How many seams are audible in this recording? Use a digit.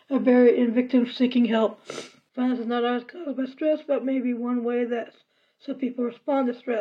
1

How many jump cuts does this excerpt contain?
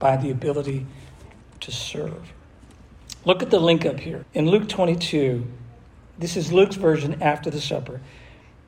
1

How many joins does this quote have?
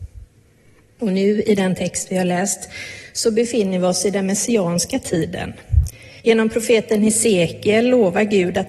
2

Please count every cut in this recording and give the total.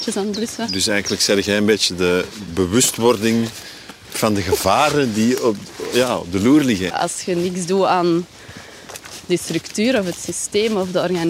1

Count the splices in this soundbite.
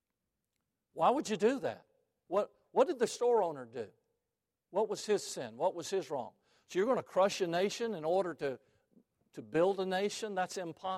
0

